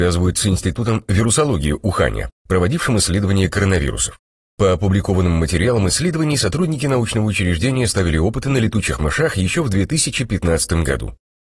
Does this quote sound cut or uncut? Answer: uncut